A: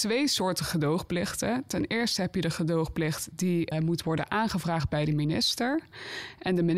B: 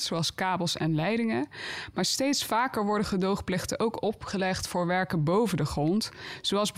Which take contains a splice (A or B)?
A